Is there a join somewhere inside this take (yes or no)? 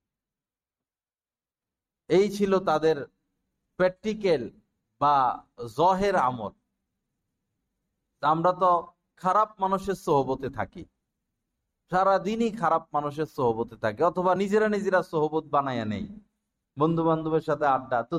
no